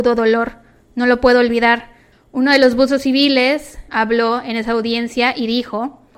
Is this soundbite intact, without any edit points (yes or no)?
no